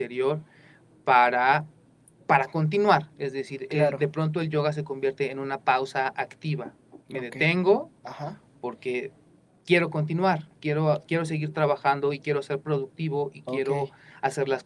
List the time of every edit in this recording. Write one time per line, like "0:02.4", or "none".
none